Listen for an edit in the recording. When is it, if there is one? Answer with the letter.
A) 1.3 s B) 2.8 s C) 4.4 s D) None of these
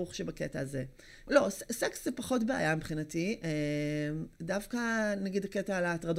A